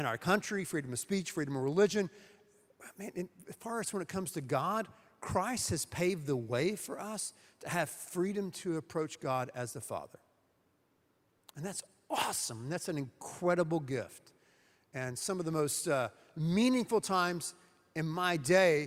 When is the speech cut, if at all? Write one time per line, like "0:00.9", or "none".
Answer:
none